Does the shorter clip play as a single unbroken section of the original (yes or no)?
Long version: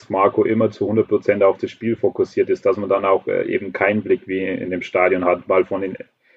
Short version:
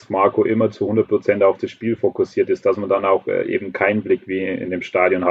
yes